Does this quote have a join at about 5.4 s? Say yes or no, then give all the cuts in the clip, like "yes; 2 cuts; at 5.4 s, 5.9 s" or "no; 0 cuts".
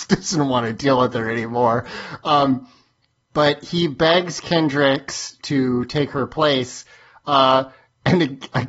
yes; 1 cut; at 5.4 s